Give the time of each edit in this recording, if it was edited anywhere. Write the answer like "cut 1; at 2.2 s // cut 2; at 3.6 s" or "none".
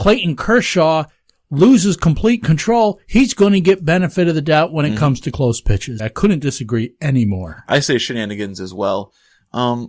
cut 1; at 6.0 s